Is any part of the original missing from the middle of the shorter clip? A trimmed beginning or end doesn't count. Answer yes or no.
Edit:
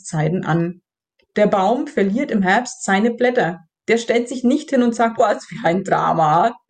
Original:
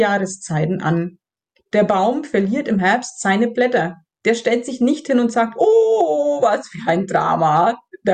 yes